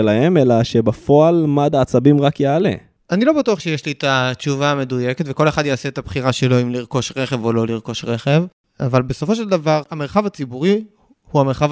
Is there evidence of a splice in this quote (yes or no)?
no